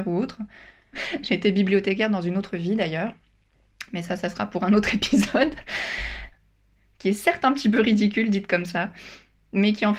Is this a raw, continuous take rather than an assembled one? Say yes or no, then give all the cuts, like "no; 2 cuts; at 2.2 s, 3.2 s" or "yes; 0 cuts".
no; 2 cuts; at 0.9 s, 6.3 s